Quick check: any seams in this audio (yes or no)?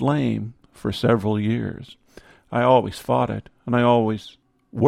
no